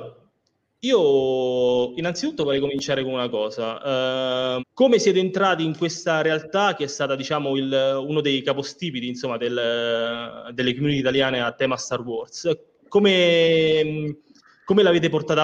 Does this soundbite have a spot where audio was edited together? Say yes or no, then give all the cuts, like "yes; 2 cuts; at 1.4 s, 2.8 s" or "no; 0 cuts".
yes; 1 cut; at 4.6 s